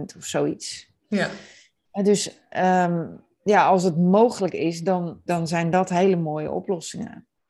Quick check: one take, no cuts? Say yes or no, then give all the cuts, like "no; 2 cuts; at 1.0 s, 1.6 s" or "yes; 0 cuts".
no; 1 cut; at 5.3 s